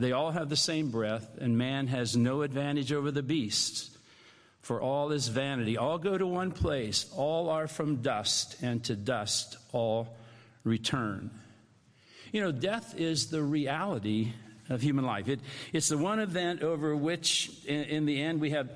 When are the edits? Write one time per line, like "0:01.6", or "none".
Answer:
none